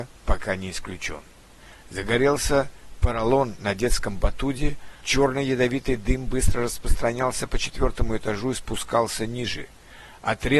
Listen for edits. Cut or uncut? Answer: cut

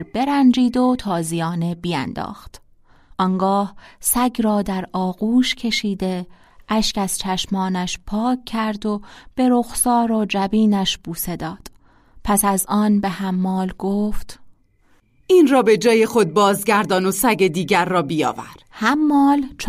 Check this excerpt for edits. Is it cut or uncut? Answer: cut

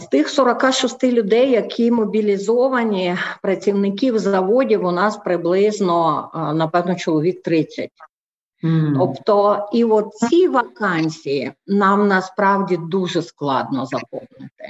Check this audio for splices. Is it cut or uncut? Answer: uncut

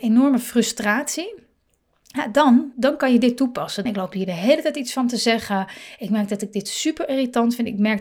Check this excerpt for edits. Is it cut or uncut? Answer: cut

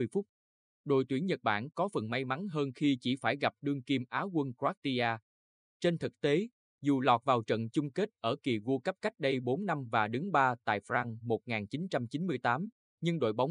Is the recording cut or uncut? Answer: uncut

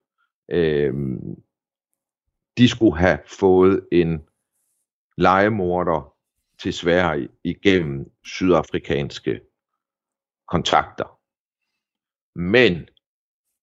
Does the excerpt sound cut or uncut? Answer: uncut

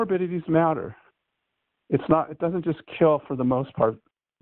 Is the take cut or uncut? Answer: uncut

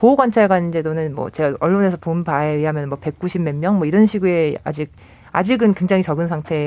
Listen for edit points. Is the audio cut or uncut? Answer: uncut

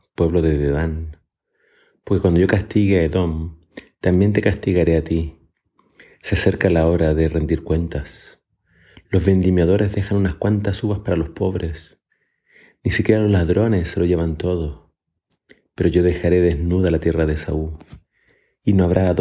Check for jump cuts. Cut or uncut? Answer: uncut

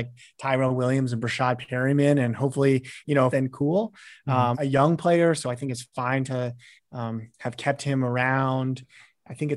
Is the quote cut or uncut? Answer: cut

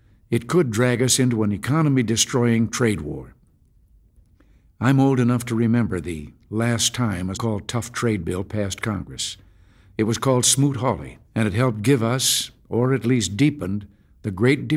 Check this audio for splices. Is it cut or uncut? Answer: cut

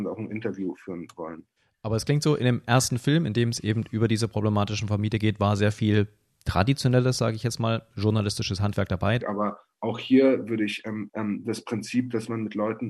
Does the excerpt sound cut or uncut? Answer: cut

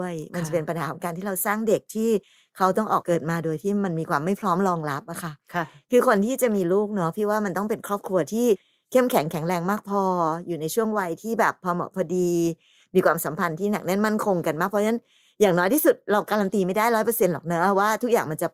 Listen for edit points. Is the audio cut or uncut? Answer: uncut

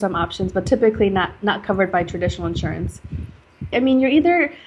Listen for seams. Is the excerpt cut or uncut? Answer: cut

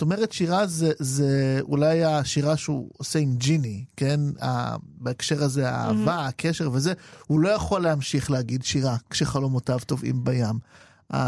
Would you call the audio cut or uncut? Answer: uncut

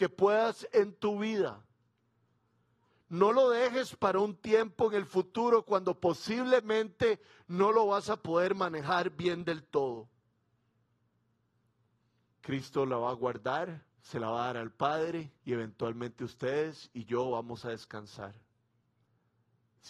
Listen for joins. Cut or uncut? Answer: cut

